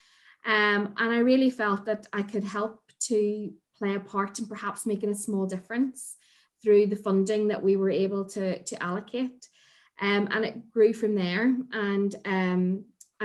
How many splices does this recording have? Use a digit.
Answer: 0